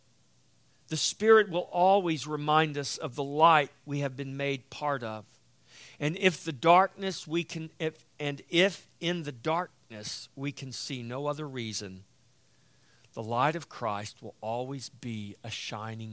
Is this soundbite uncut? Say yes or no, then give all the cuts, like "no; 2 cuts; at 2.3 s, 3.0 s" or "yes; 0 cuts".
yes; 0 cuts